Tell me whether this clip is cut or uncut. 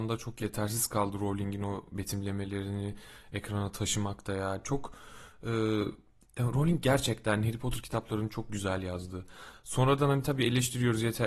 uncut